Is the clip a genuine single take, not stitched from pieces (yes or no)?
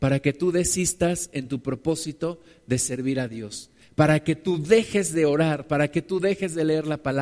yes